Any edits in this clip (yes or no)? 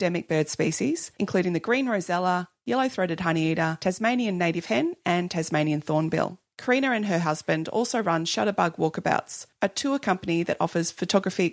no